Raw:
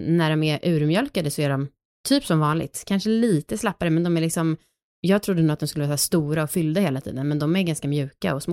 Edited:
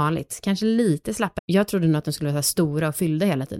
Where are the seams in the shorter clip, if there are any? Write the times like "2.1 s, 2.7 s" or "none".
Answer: 1.4 s